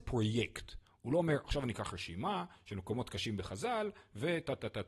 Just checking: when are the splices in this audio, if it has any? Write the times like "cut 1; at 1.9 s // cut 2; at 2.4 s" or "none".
none